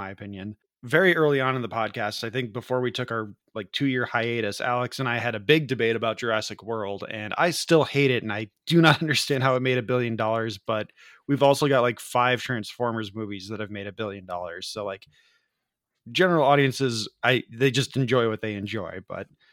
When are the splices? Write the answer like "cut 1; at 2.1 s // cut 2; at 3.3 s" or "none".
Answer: none